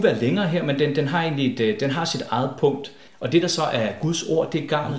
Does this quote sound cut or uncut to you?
cut